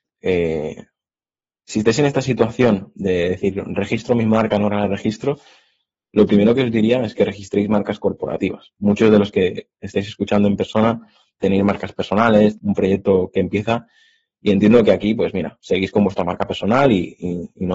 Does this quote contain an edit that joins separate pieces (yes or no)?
yes